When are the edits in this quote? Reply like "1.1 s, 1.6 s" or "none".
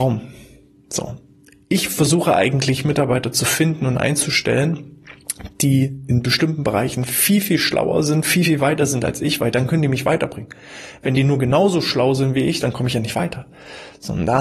none